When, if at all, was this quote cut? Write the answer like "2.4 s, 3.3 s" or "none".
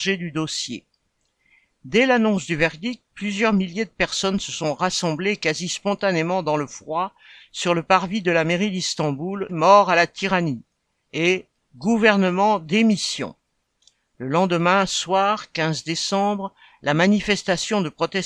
9.5 s

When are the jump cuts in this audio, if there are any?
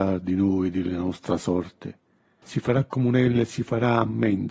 2.4 s

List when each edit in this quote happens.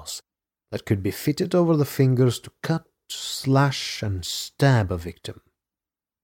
none

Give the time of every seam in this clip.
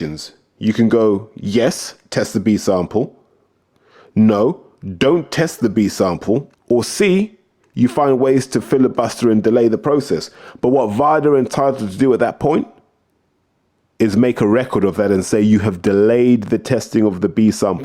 6.5 s

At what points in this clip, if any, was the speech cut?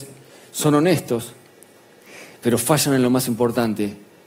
none

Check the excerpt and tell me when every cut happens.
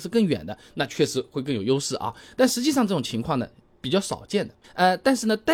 4.6 s

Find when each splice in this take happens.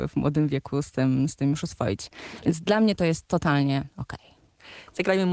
none

